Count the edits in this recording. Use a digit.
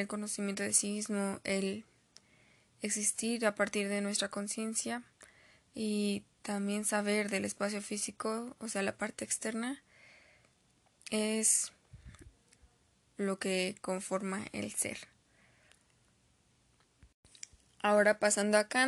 0